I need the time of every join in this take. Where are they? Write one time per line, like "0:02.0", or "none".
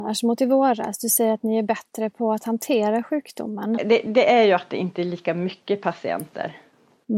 0:03.8